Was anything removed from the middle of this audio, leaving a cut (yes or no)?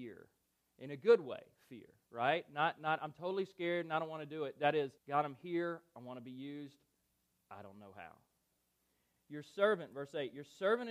yes